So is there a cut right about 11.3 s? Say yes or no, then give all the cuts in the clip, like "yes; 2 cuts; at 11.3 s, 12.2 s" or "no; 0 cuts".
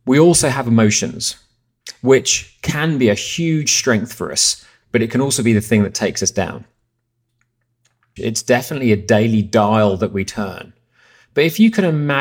no; 1 cut; at 8.2 s